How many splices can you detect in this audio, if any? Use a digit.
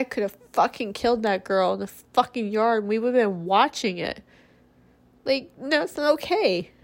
0